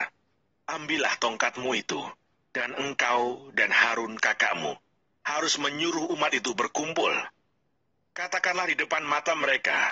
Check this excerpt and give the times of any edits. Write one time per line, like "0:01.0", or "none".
none